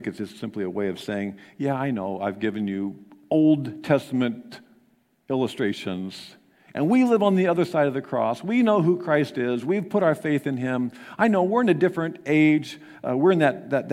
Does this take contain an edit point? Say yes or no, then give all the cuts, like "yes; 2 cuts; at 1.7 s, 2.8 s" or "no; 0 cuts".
no; 0 cuts